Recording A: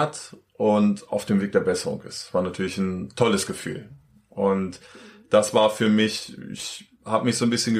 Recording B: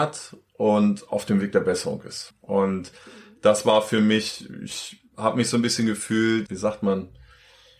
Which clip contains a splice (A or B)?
B